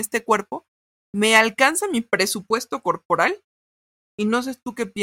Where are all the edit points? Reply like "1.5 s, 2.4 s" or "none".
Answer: 4.0 s